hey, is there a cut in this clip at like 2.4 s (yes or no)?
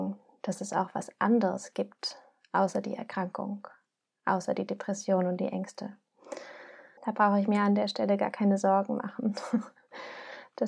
no